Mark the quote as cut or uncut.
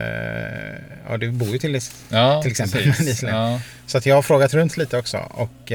uncut